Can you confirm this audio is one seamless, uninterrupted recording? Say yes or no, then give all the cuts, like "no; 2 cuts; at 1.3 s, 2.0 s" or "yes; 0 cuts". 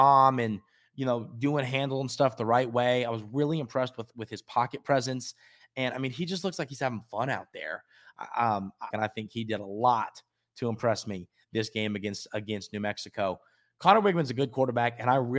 no; 1 cut; at 8.9 s